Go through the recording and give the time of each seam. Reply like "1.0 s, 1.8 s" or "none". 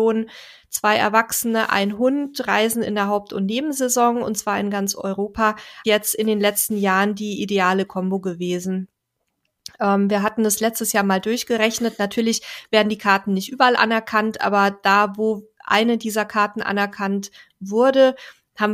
5.8 s